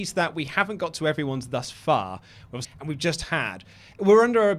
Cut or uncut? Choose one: cut